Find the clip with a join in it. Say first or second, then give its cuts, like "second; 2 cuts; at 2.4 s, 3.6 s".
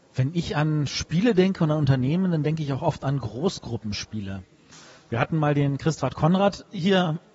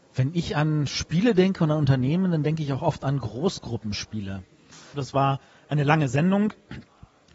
second; 1 cut; at 4.9 s